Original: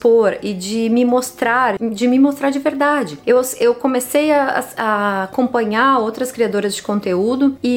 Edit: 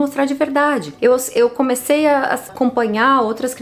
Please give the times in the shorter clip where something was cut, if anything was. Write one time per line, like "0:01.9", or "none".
0:02.5